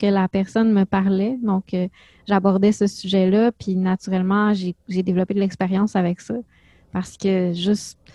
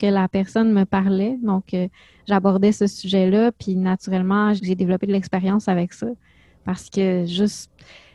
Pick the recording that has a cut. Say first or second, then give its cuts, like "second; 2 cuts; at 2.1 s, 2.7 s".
second; 1 cut; at 4.6 s